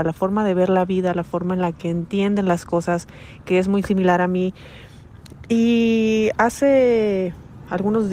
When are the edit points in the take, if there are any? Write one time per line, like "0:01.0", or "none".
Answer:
none